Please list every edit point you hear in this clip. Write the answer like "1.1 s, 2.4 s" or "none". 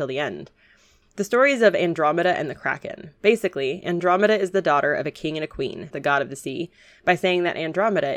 1.0 s, 5.9 s

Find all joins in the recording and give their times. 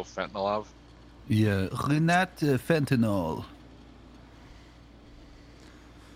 none

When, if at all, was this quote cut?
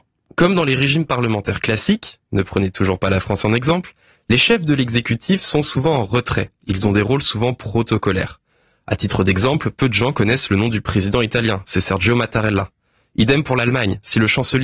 none

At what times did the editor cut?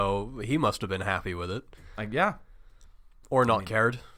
none

